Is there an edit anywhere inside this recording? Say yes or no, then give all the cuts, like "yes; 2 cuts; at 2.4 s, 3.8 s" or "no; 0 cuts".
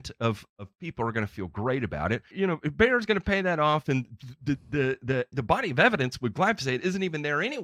yes; 2 cuts; at 2.3 s, 5.3 s